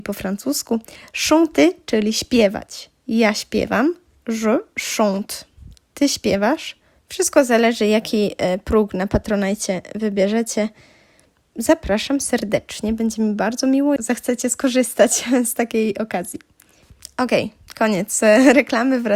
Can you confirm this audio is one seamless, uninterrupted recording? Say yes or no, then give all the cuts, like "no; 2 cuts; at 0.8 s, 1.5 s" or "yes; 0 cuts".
no; 2 cuts; at 7.0 s, 14.0 s